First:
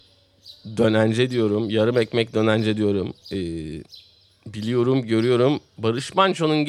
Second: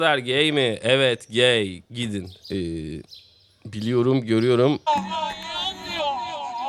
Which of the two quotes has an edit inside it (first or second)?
second